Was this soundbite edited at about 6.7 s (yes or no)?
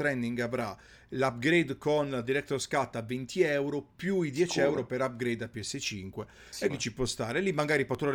yes